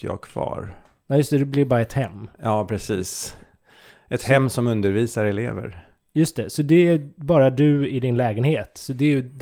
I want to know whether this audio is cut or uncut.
uncut